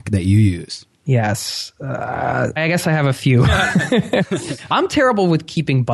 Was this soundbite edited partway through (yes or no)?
yes